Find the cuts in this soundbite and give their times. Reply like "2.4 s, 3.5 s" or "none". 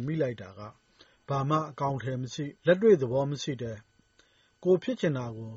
2.6 s